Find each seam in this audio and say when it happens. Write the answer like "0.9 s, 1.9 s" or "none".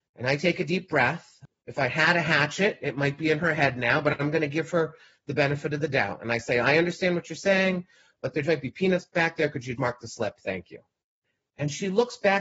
8.4 s, 9.8 s